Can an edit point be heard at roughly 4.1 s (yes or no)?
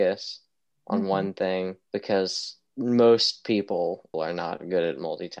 yes